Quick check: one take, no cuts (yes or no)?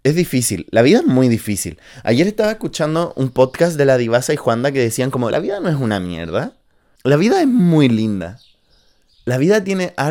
no